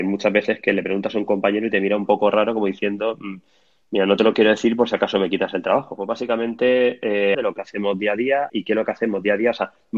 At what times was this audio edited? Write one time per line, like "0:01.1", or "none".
0:06.0
0:07.3
0:08.5